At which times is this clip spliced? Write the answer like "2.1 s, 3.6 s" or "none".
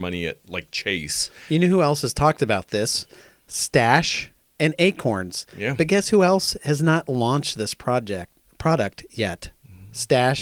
none